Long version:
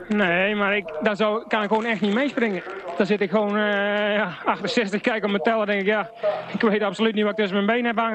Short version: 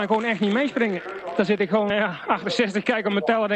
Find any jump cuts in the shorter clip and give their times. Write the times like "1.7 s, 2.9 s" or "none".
1.9 s

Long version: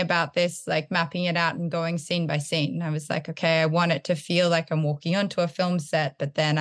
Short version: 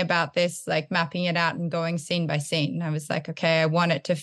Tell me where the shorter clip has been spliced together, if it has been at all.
none

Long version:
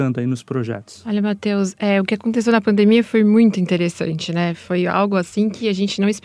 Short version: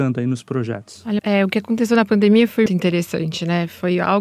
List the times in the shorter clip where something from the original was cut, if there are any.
1.2 s, 2.7 s

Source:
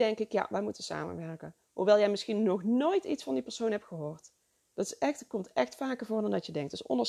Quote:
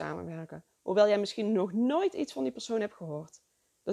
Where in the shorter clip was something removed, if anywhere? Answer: none

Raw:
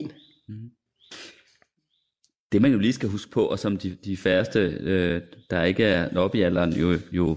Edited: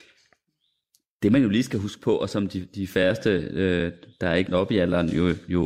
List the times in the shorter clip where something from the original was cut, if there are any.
4.5 s

